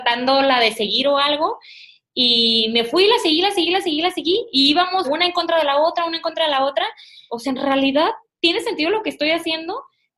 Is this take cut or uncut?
cut